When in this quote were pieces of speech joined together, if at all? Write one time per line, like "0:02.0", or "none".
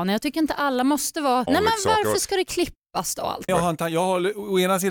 0:01.5
0:03.5